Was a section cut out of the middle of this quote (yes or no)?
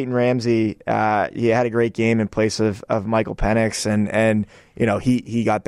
no